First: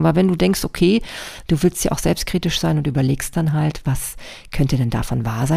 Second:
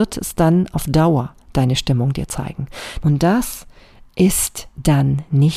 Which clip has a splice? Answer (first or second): second